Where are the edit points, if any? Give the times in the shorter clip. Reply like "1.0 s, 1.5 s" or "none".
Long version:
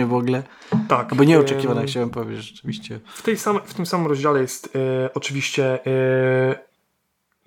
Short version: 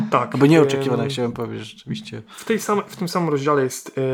none